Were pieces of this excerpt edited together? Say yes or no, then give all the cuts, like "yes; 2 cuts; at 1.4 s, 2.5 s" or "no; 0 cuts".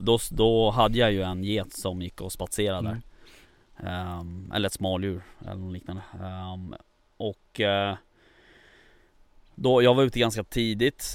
no; 0 cuts